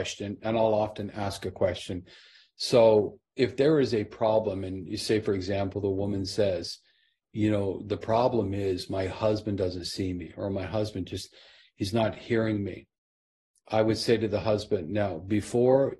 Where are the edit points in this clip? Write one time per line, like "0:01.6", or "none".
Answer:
none